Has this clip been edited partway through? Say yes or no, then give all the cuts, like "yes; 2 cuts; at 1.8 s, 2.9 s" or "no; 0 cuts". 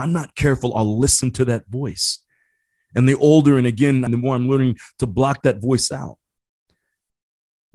yes; 1 cut; at 4.1 s